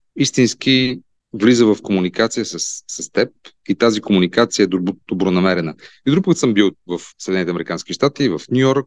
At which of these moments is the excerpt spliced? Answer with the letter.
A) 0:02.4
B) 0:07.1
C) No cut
B